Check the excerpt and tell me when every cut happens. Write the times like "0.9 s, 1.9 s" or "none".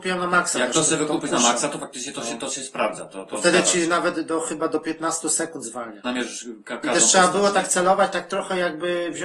6.0 s